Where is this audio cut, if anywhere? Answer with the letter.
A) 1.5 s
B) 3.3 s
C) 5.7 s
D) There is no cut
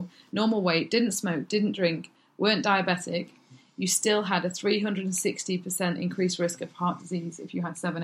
D